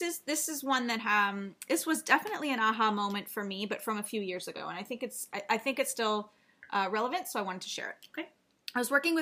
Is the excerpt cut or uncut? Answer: uncut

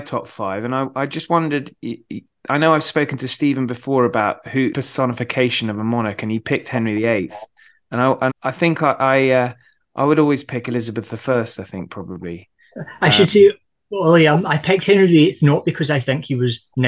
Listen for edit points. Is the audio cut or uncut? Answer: cut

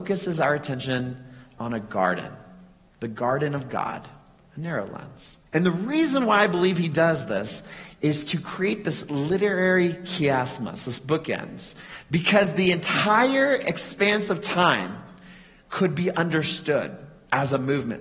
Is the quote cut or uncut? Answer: cut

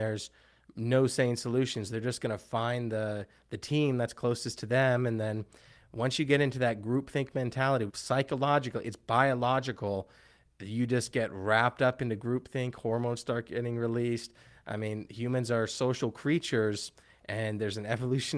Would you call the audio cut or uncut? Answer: cut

